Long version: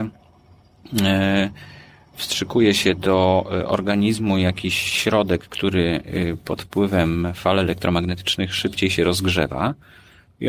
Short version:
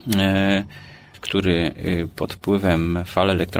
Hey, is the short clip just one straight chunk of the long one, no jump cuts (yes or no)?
no